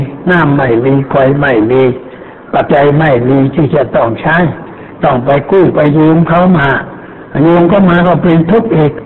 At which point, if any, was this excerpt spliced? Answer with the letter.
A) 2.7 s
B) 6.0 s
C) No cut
A